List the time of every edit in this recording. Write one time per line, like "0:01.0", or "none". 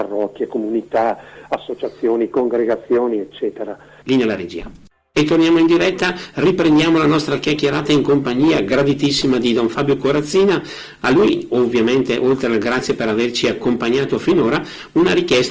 0:04.0